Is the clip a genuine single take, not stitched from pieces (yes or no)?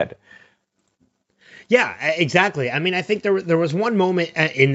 yes